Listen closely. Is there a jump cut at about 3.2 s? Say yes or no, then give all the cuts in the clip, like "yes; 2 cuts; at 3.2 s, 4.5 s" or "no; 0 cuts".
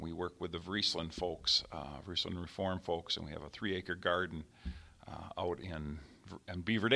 no; 0 cuts